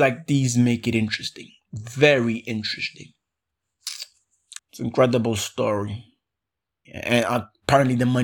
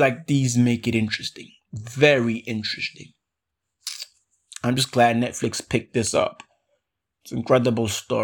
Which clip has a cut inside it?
first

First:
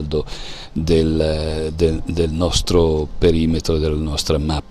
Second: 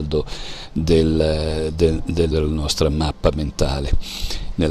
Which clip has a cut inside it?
second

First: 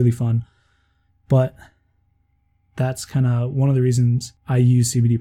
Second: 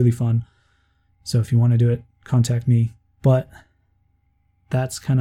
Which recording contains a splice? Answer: first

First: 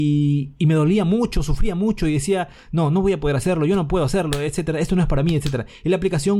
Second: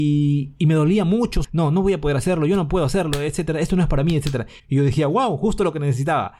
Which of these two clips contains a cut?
second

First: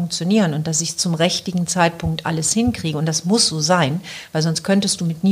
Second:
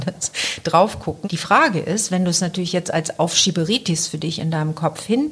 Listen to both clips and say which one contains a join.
second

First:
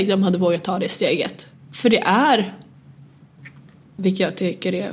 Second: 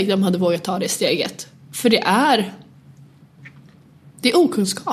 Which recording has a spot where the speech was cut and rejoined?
first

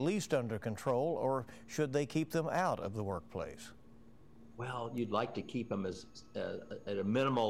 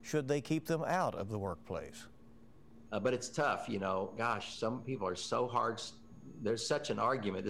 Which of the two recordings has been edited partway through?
second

